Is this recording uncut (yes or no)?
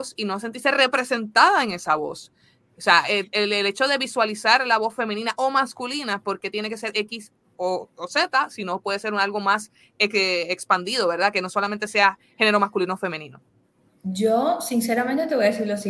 yes